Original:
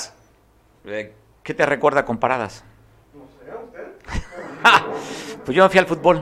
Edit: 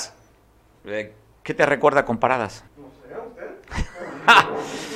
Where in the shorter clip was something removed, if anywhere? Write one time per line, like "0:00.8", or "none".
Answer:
0:02.7

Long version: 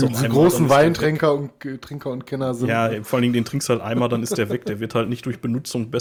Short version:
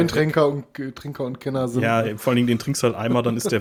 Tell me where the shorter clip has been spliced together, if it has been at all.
none

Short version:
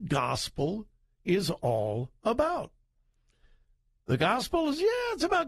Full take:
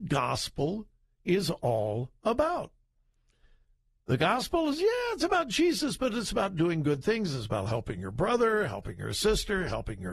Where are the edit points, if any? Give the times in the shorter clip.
none

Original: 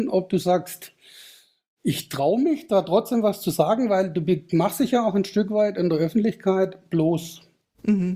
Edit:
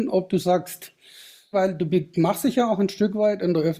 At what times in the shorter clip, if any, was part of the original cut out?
0:01.5

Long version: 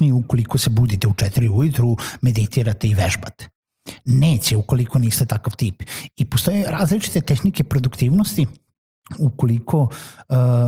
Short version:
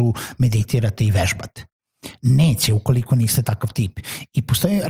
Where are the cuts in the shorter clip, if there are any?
none

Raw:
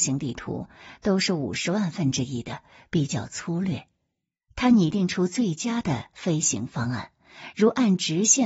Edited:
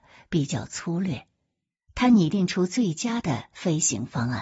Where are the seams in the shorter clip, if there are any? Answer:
none

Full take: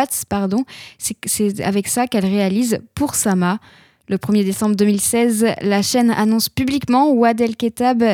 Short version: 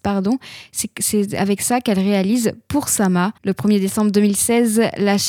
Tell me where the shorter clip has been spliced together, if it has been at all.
0:03.4

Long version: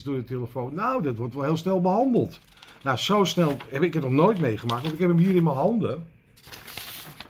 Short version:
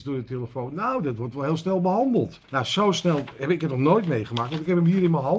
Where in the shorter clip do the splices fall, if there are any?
0:02.4

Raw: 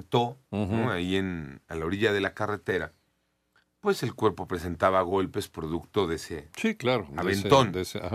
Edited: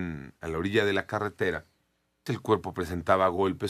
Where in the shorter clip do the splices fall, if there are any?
0:02.3

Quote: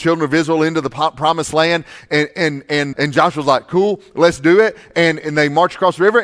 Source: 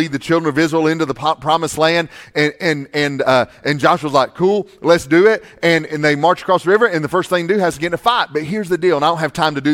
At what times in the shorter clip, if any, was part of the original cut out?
0:02.9

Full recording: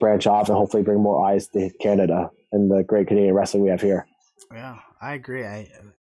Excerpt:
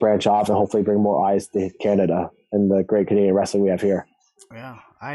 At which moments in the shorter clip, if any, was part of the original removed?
none

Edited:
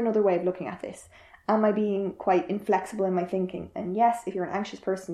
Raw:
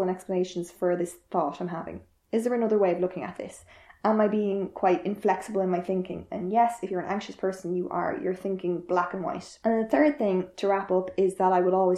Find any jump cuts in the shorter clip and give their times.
none

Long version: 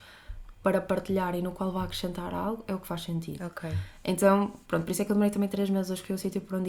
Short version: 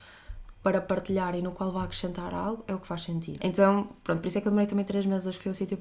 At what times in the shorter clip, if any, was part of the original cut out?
0:03.4

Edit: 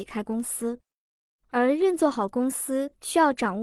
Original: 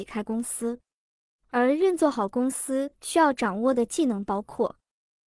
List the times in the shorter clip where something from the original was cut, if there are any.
none

